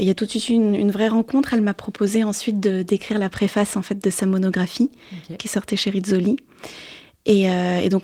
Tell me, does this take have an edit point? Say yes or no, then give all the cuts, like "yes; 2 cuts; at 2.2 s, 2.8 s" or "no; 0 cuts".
no; 0 cuts